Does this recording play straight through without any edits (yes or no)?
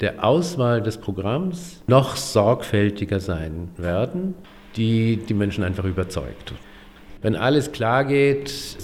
no